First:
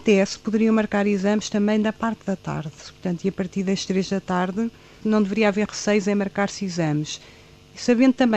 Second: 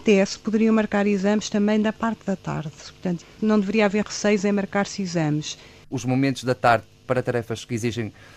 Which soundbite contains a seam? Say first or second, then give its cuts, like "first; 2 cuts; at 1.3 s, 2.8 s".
second; 2 cuts; at 3.2 s, 5.8 s